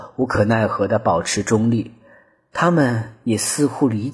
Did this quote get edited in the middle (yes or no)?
no